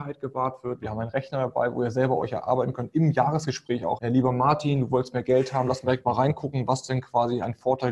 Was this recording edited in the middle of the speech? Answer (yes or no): yes